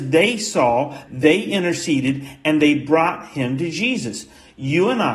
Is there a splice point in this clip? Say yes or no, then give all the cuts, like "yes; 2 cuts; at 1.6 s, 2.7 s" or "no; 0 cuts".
yes; 1 cut; at 1.1 s